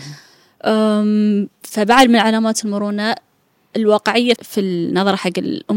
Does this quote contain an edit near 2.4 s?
no; 1 cut; at 4.4 s

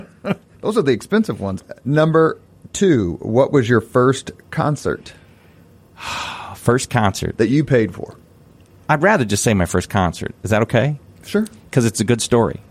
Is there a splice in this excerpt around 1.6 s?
yes; 1 cut; at 1.6 s

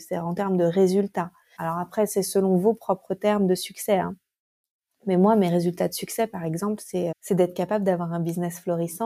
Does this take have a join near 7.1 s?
yes; 2 cuts; at 1.6 s, 7.1 s

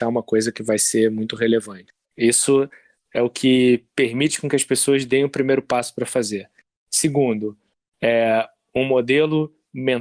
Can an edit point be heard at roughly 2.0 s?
yes; 1 cut; at 2.0 s

